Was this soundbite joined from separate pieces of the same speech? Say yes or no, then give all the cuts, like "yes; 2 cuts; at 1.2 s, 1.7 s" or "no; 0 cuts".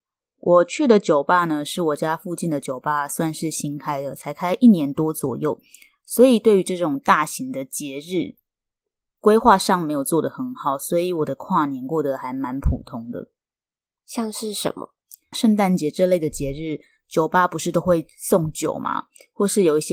yes; 1 cut; at 15.3 s